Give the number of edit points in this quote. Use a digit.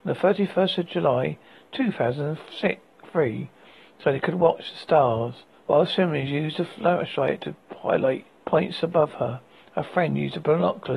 2